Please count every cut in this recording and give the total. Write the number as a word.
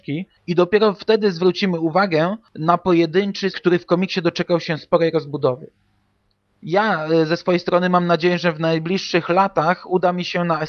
one